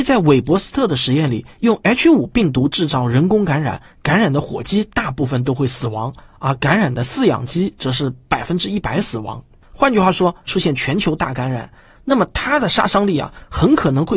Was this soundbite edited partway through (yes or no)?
yes